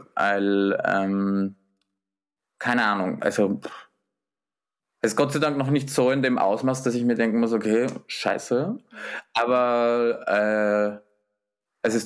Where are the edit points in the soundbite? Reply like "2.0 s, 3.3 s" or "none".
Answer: none